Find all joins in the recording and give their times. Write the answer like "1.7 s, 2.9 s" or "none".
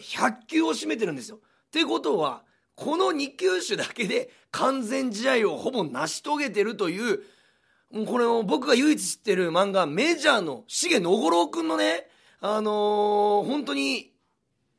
none